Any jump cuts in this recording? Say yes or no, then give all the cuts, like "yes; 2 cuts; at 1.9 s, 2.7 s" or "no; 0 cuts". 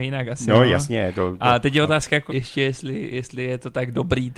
yes; 1 cut; at 2.3 s